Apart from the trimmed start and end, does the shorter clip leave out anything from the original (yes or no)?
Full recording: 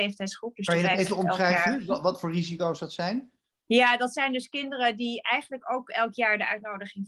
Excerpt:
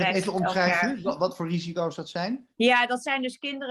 yes